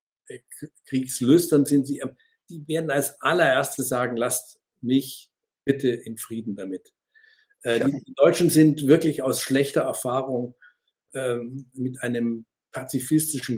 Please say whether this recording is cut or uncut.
uncut